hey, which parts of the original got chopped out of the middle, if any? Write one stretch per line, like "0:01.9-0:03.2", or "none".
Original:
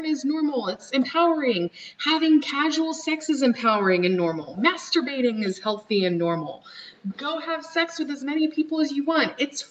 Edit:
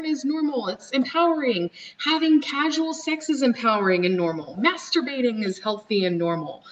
none